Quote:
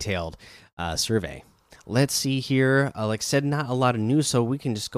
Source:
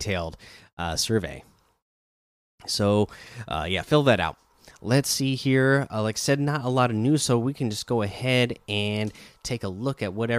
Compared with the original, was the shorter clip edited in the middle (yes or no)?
yes